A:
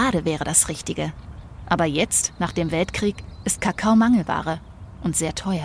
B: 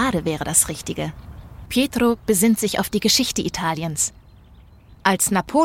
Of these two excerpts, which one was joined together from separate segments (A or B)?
B